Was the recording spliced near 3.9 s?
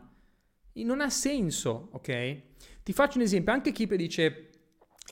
yes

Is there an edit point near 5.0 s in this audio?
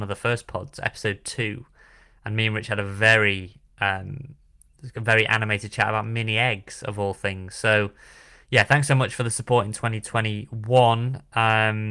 no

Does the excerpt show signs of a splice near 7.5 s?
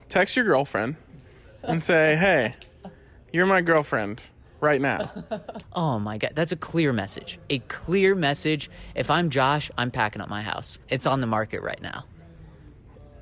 no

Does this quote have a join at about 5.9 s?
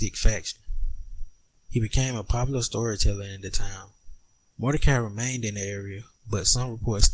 no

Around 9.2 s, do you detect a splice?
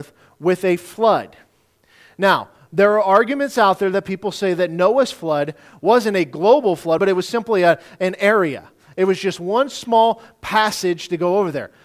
no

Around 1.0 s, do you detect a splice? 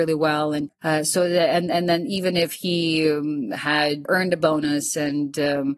no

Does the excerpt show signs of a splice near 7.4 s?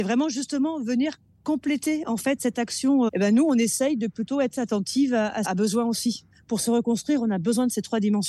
no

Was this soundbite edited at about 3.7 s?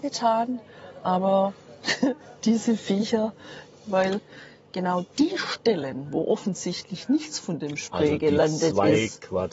yes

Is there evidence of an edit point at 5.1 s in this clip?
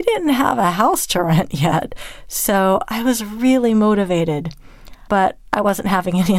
yes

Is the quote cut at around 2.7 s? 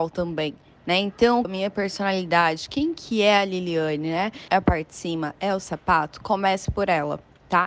no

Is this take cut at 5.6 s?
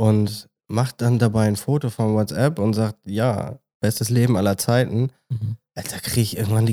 no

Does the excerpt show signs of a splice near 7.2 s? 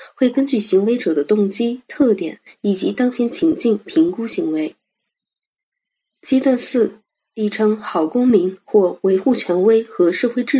yes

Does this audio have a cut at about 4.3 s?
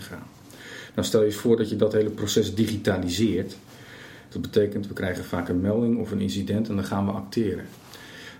yes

